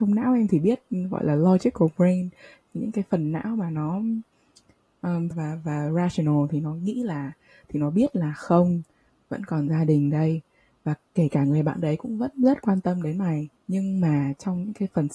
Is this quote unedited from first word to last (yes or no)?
no